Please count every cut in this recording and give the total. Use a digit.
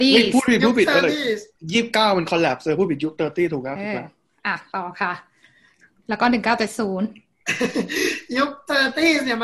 0